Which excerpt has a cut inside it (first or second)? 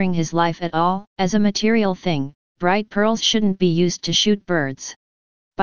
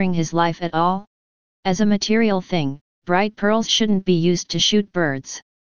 first